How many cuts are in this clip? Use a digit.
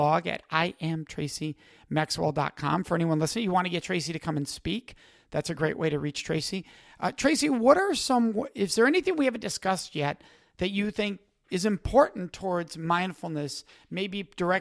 0